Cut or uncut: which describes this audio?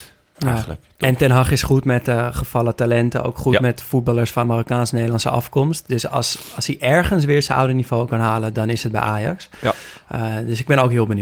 uncut